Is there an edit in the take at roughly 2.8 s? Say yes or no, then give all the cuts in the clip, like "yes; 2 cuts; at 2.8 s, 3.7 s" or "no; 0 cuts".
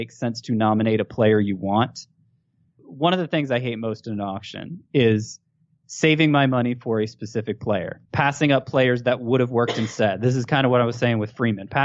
yes; 2 cuts; at 2.8 s, 8.1 s